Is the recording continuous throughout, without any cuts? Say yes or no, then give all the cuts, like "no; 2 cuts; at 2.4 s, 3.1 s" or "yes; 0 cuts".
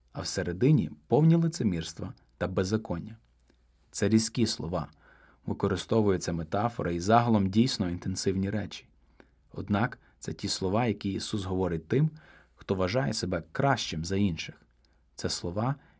yes; 0 cuts